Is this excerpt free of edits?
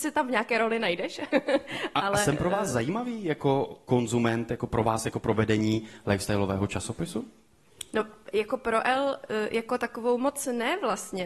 yes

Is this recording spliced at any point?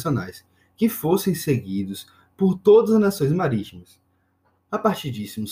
no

